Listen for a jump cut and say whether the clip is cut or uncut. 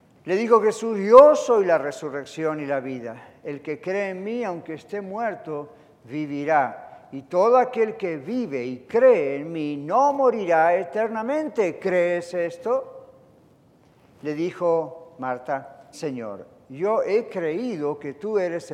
cut